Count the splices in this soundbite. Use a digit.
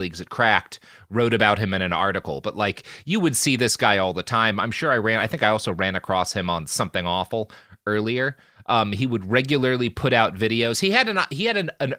0